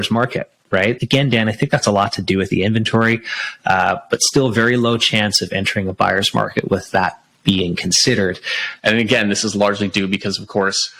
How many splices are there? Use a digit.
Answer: 2